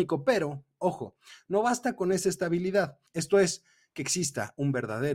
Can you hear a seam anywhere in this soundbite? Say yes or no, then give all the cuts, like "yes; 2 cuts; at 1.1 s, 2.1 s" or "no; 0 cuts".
yes; 1 cut; at 3.1 s